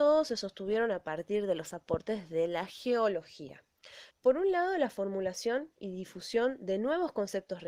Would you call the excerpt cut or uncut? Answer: cut